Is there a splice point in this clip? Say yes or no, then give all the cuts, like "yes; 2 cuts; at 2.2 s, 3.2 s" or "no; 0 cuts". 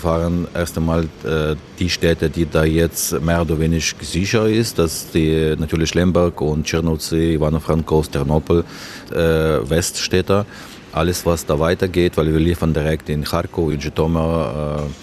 yes; 2 cuts; at 9.1 s, 13.7 s